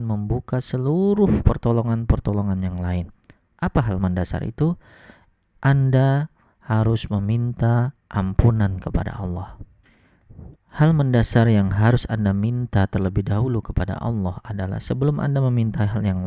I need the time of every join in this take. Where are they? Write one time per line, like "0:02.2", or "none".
0:10.5